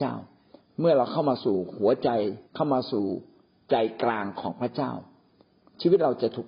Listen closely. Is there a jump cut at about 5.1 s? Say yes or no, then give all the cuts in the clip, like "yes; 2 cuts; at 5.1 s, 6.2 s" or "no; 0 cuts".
no; 1 cut; at 2.5 s